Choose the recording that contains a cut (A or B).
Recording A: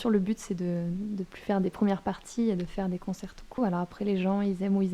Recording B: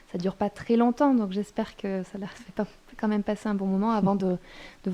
A